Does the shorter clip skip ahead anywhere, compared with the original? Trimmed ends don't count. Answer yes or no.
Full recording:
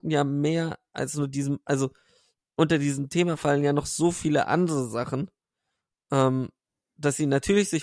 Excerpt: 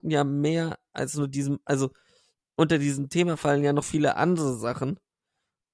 yes